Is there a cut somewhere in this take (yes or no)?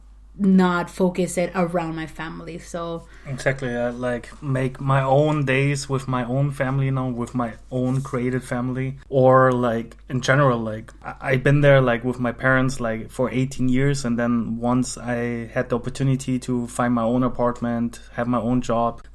no